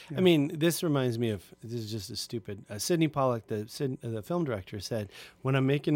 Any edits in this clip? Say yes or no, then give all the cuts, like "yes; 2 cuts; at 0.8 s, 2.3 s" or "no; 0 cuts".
no; 0 cuts